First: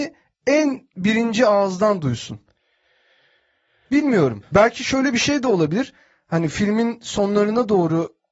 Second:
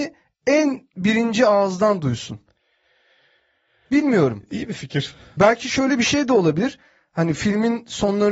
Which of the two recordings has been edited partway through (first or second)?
first